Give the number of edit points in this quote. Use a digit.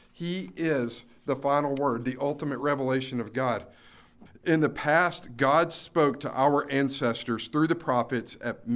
1